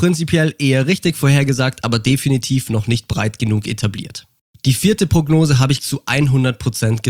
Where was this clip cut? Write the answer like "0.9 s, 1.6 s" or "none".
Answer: 5.8 s